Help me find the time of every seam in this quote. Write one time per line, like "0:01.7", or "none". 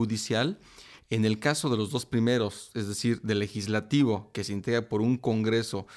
none